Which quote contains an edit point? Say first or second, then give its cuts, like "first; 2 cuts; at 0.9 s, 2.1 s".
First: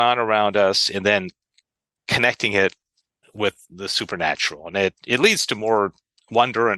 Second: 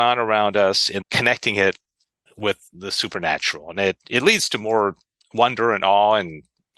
second; 1 cut; at 1.0 s